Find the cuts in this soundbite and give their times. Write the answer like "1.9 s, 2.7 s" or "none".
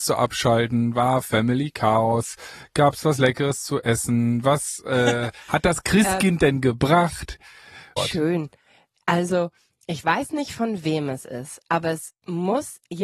8.0 s